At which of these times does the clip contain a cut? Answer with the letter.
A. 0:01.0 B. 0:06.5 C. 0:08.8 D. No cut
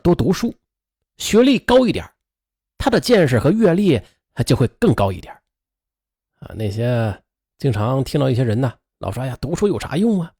D